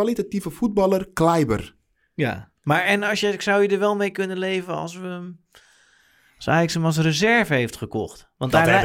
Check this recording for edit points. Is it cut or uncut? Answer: uncut